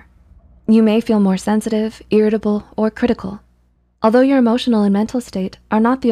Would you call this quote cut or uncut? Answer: uncut